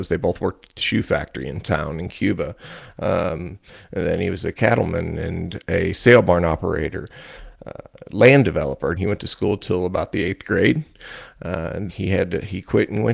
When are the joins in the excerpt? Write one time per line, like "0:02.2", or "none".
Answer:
0:09.0
0:11.9